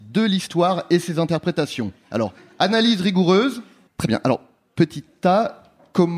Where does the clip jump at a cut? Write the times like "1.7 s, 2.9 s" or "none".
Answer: 3.9 s